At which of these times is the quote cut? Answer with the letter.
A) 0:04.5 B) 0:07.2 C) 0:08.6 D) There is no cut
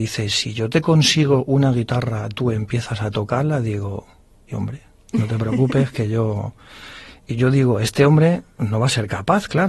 A